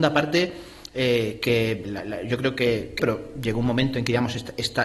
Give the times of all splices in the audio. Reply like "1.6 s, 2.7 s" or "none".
1.8 s, 3.0 s